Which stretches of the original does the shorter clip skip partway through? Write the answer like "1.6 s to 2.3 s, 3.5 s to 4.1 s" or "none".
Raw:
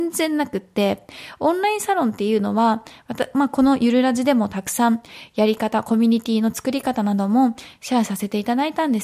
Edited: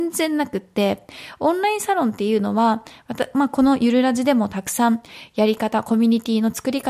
none